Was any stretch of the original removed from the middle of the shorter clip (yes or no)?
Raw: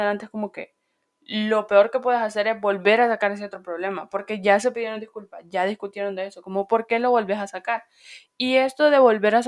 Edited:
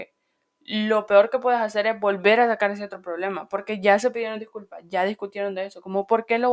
no